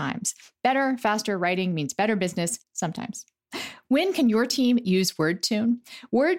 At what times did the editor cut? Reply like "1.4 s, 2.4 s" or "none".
2.6 s